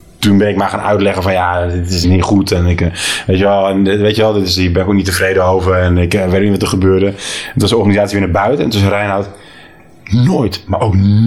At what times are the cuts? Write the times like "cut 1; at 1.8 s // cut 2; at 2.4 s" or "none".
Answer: cut 1; at 2.0 s